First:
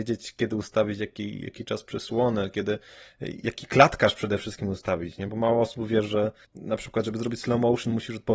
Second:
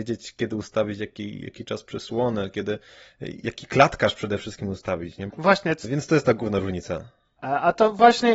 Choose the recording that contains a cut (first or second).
second